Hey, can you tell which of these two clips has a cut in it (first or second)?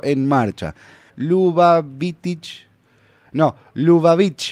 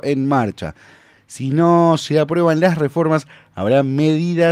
first